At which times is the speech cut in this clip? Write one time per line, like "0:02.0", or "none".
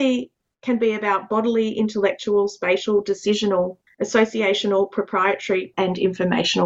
0:03.9
0:05.7